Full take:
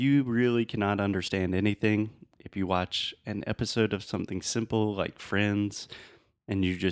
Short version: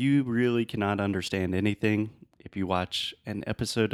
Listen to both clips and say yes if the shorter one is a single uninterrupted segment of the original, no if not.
yes